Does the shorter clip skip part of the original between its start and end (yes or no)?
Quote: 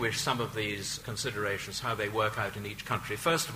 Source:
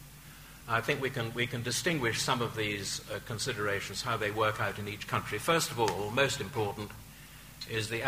yes